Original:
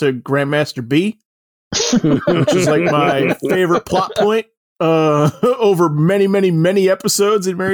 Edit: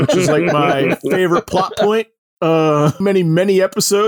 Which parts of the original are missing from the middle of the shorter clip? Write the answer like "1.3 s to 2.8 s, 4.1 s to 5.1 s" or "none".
5.4 s to 6.3 s